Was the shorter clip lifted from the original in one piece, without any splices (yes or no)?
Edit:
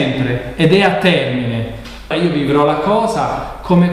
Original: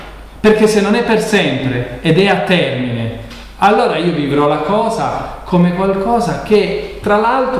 no